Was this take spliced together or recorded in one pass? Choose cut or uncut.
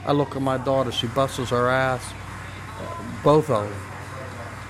uncut